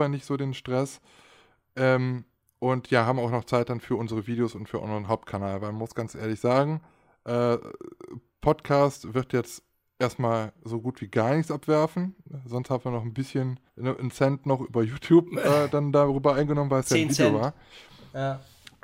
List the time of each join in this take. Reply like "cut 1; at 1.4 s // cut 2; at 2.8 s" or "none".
cut 1; at 13.7 s